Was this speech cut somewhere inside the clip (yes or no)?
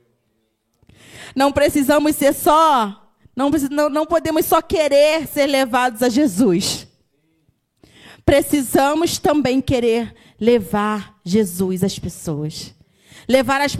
no